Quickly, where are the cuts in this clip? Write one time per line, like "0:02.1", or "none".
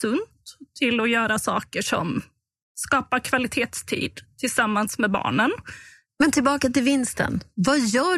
0:06.1

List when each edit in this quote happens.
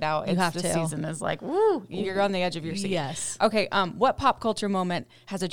none

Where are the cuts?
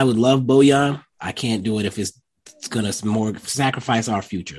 none

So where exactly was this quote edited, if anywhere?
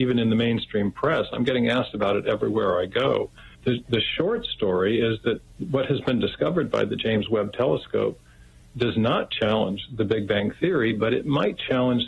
0:03.5

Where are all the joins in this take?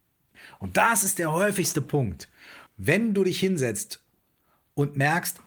0:02.7

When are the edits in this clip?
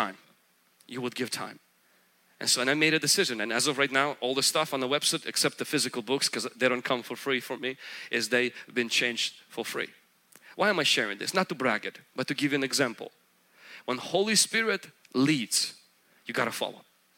none

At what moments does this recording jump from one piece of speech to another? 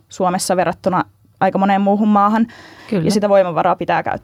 0:02.8

